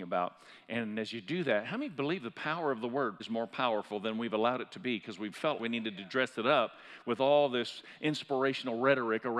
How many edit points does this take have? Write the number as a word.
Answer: two